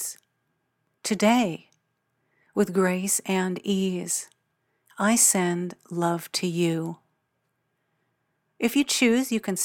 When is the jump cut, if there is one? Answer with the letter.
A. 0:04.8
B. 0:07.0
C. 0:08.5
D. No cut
D